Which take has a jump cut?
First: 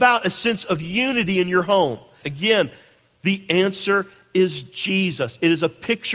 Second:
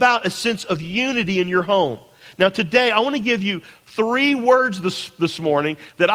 first; 1 cut; at 2.2 s

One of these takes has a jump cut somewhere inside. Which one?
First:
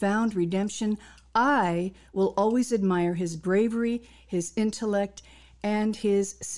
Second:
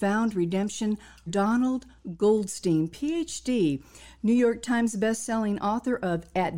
second; 1 cut; at 1.3 s

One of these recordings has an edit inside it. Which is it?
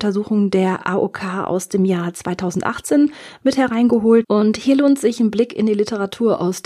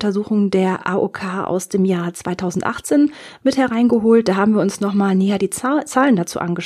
first; 1 cut; at 4.2 s

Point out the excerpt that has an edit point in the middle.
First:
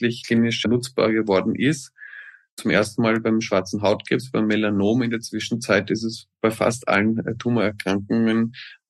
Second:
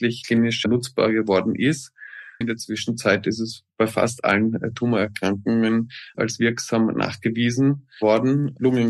second; 2 cuts; at 2.4 s, 6.1 s

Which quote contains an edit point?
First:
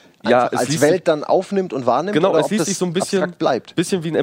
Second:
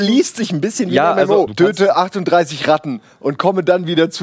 second; 1 cut; at 1.5 s

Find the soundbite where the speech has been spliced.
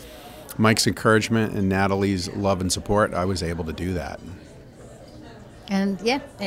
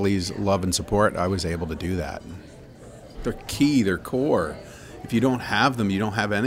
second; 1 cut; at 3.1 s

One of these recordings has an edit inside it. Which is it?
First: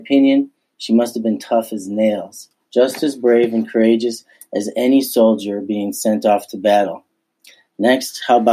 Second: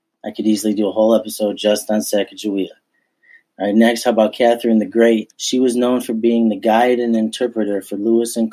second; 1 cut; at 5.3 s

